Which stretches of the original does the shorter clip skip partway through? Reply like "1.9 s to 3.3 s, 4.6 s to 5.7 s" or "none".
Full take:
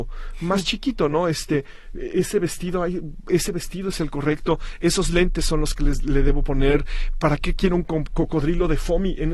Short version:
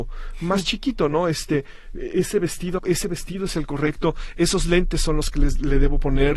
2.8 s to 3.2 s